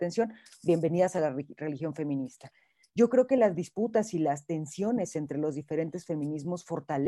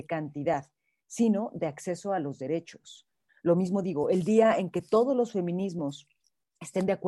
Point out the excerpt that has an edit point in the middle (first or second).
second